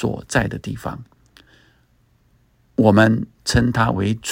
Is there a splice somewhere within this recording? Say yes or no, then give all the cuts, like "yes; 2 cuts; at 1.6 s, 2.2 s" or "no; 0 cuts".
no; 0 cuts